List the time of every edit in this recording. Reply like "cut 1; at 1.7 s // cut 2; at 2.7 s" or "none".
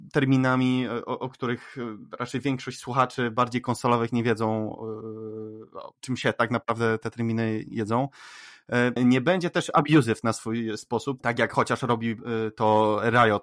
cut 1; at 9.0 s // cut 2; at 11.2 s